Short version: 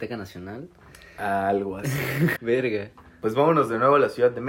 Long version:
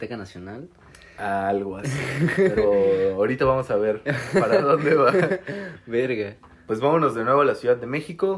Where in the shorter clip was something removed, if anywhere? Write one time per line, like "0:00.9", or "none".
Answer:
0:02.4